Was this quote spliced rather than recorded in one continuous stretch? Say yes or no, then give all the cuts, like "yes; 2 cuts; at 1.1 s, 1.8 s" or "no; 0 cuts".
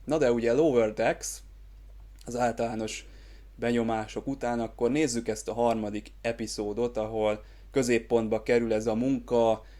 no; 0 cuts